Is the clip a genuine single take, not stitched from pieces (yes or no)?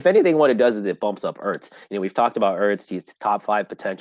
yes